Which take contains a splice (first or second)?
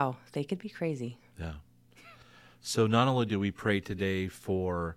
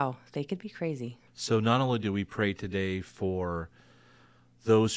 second